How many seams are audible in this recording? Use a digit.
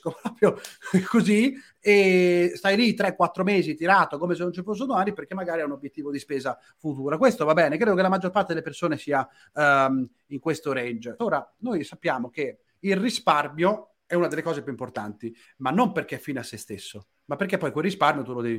1